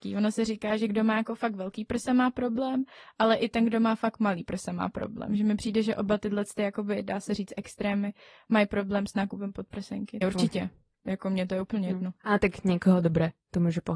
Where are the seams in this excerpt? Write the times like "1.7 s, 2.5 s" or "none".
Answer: 10.2 s